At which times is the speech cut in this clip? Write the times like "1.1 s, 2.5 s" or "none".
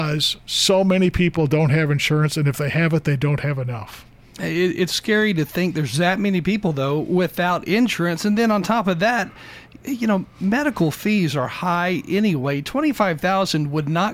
none